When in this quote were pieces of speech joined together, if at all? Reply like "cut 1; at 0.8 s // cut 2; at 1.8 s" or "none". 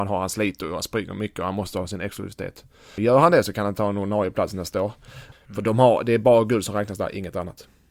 cut 1; at 3.0 s // cut 2; at 5.3 s